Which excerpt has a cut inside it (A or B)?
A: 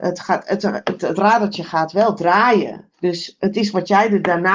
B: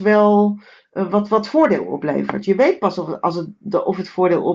A